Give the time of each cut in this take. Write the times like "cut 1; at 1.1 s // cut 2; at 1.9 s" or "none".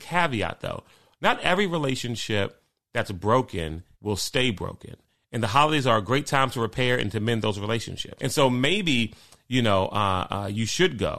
cut 1; at 3.9 s // cut 2; at 8.2 s

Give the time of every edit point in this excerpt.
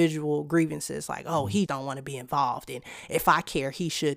cut 1; at 1.7 s

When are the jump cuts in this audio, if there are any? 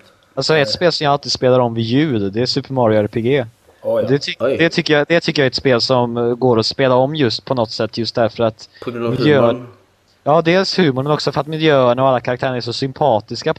none

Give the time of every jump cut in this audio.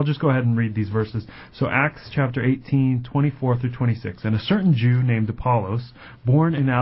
none

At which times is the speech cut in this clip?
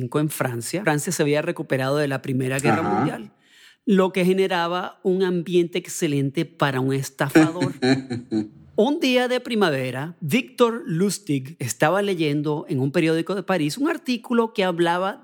none

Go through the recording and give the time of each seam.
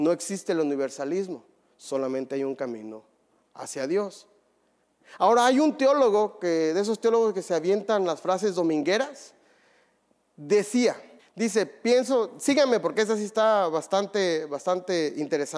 cut 1; at 11.2 s

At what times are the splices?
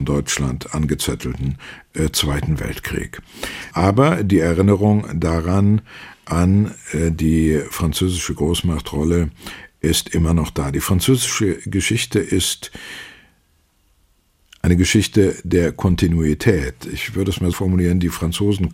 cut 1; at 3.7 s // cut 2; at 17.5 s

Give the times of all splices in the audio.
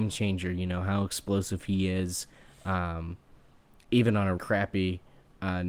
cut 1; at 4.4 s

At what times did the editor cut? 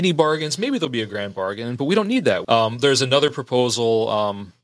cut 1; at 2.4 s

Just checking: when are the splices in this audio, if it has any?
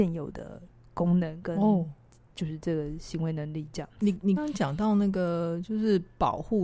cut 1; at 4.4 s

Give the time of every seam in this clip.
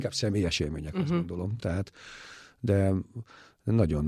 none

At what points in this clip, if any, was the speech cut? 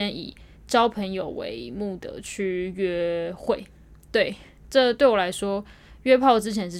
cut 1; at 2.0 s

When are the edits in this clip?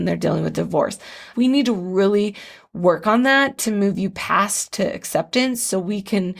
cut 1; at 1.3 s

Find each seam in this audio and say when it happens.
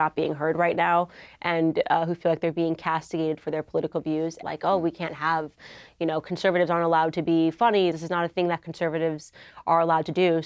cut 1; at 4.4 s // cut 2; at 7.9 s

